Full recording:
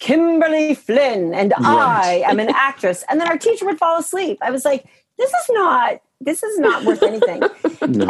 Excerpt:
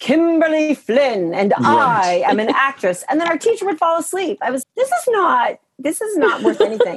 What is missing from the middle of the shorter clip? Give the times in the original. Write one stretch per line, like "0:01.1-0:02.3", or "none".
0:04.6-0:05.0